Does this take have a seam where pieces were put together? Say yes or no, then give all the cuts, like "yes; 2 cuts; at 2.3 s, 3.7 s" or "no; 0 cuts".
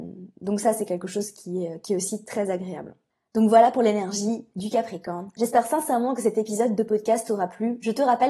no; 0 cuts